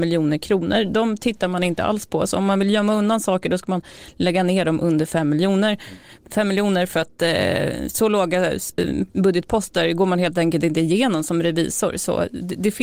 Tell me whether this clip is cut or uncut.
uncut